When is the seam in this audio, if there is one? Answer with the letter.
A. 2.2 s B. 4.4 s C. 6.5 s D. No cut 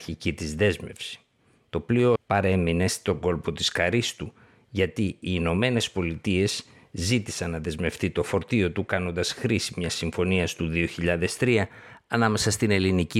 A